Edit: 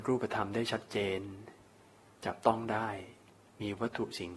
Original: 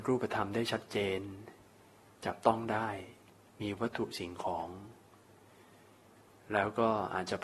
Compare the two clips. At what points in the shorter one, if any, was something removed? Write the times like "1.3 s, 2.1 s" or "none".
none